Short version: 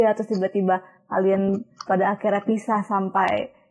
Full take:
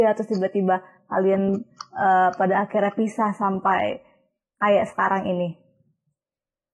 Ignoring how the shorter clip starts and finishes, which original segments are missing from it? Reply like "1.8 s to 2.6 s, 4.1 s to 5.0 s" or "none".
1.9 s to 2.4 s